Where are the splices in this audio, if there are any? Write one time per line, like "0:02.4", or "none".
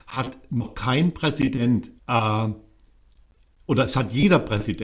0:02.0